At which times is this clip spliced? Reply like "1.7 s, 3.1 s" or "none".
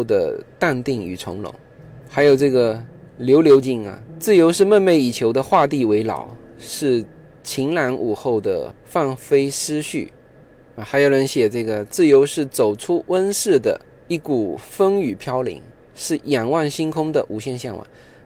3.6 s